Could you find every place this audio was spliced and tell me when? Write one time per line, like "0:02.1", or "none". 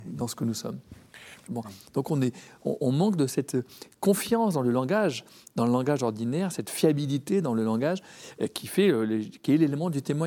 0:01.5